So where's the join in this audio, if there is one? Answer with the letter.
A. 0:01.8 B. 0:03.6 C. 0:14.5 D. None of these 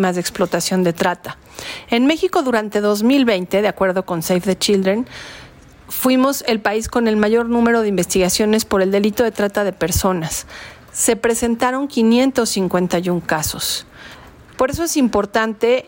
C